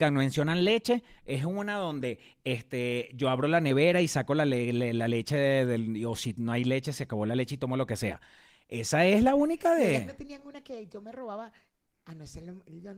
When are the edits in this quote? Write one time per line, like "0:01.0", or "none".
none